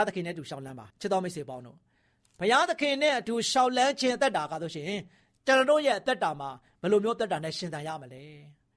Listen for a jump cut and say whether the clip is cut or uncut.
cut